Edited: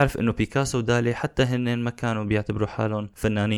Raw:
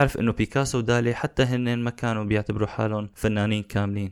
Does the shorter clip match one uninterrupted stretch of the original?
yes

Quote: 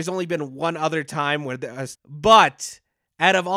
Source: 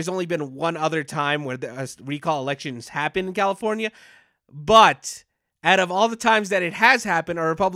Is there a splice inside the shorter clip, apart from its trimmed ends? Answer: yes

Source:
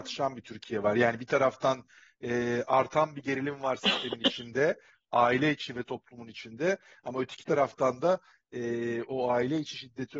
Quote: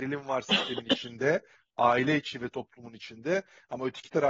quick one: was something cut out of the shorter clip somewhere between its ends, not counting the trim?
no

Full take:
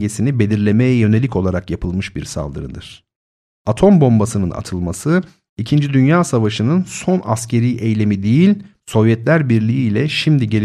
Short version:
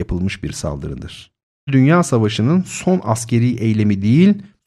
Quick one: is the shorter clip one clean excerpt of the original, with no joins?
no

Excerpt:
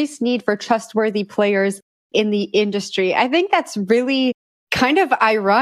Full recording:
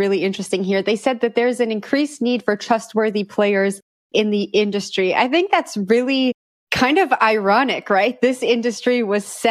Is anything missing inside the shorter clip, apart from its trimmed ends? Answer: no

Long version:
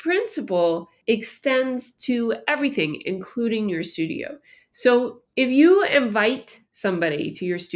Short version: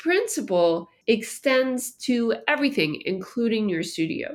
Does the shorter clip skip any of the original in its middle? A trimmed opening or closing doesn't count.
no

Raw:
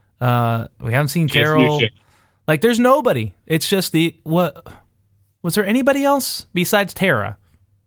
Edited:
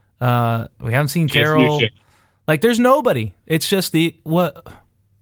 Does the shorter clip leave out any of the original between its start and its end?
no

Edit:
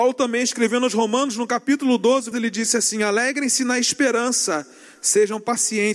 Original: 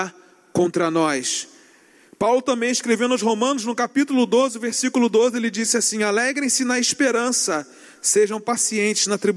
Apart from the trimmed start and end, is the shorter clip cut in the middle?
yes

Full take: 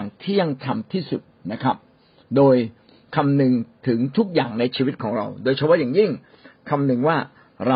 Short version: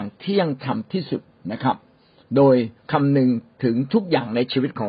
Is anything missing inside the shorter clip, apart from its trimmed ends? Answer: yes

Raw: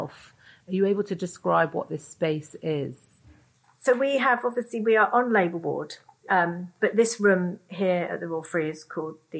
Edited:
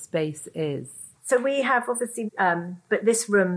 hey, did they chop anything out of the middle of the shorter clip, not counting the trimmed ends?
yes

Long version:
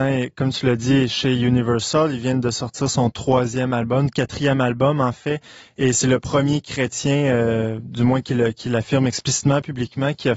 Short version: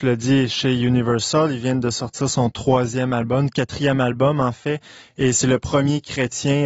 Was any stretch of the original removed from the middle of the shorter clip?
no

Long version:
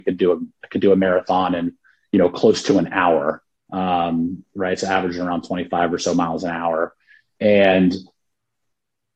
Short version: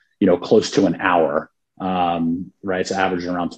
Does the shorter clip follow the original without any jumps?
yes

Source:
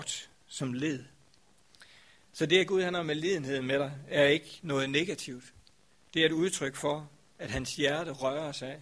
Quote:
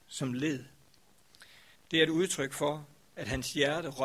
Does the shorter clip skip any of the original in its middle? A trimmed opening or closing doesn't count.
yes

